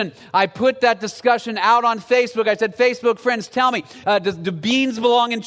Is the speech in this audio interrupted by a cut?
yes; 1 cut; at 4.0 s

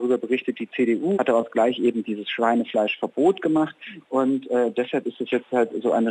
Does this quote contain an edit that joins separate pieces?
yes; 2 cuts; at 1.1 s, 4.0 s

